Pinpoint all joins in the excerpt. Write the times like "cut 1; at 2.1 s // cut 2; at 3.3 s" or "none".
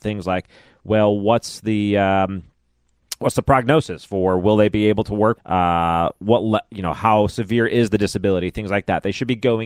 cut 1; at 5.4 s